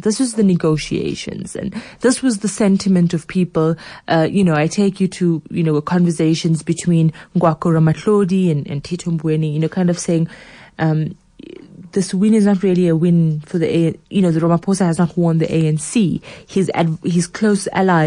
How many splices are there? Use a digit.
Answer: 0